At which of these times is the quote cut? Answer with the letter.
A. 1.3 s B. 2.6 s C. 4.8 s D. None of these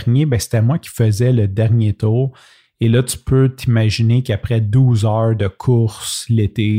D